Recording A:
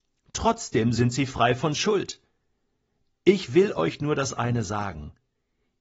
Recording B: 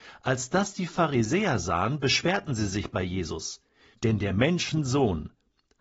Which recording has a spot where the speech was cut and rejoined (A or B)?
B